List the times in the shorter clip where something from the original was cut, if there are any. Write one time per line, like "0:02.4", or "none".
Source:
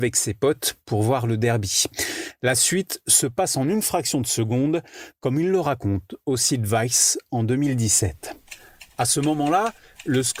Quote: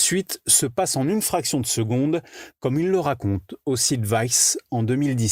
none

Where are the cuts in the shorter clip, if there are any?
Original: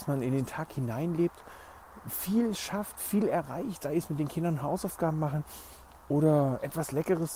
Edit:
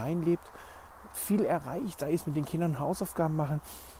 0:01.1

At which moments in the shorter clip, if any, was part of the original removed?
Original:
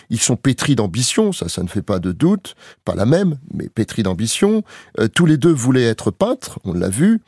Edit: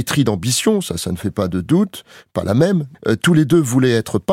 0:02.9

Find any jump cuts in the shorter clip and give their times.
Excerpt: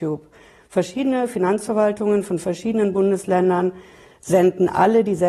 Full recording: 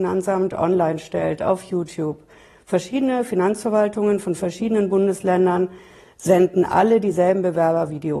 none

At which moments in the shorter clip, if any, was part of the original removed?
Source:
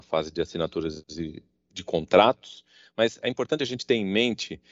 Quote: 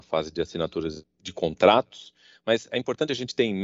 0:01.0

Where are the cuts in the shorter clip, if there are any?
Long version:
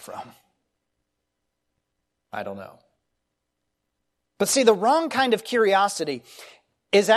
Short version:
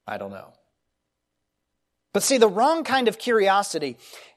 none

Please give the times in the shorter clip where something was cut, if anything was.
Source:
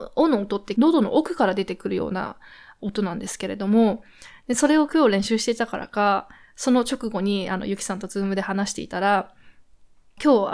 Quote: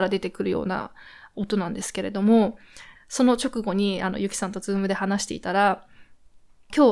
0:02.9

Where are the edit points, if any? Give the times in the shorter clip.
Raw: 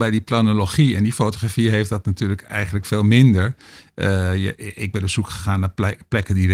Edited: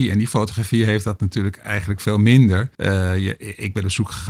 0:02.7

